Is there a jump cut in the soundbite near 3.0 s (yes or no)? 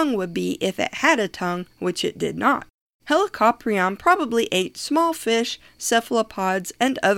yes